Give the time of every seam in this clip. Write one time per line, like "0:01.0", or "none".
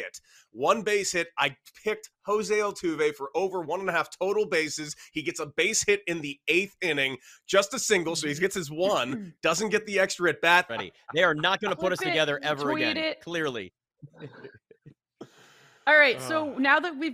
0:10.7